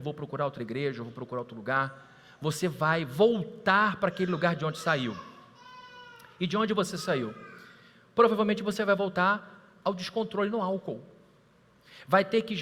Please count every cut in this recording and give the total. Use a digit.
0